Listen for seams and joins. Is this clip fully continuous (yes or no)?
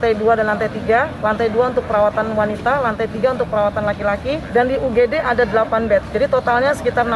yes